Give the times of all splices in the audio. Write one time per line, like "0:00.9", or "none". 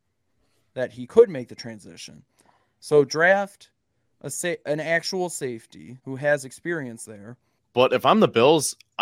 0:06.0
0:07.6